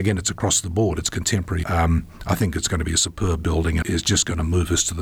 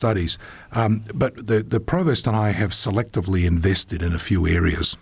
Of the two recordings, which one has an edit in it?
first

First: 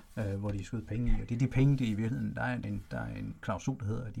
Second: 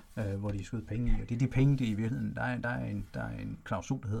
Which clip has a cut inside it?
first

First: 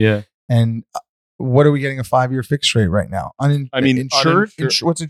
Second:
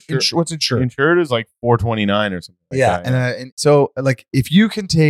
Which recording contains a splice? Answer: second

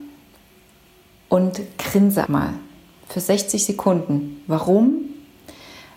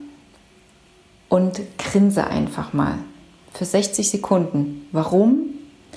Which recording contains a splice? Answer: first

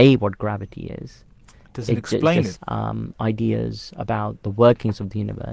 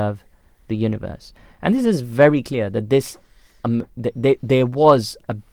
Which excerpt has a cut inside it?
first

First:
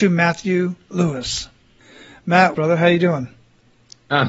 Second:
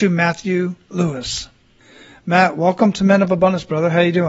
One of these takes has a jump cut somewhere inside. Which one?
first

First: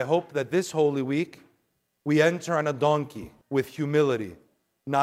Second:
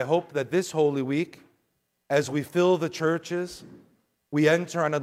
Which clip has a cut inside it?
first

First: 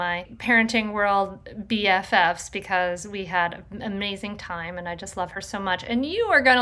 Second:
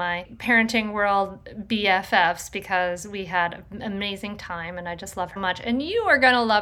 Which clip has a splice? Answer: second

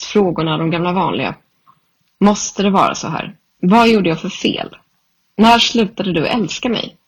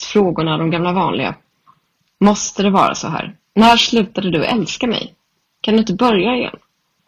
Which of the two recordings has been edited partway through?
second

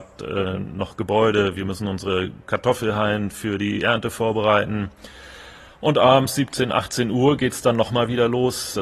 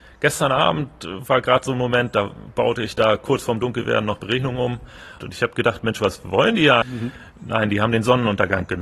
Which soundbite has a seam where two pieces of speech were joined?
second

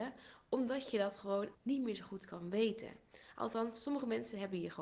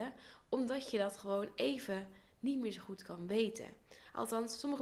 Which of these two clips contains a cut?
first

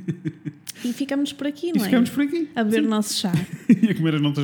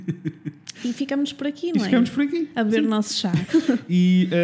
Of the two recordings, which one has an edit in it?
second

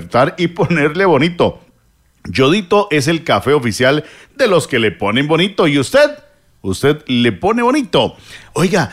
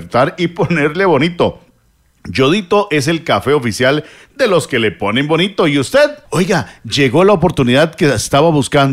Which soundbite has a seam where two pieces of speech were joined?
second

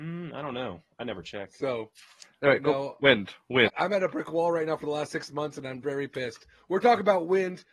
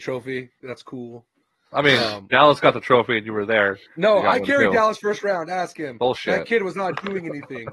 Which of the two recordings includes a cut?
first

